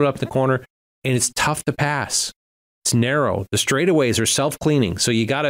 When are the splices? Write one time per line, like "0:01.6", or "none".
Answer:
none